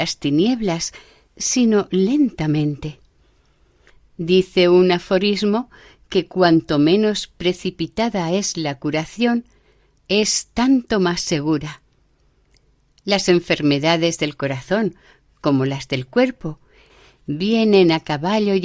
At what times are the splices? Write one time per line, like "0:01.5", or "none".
none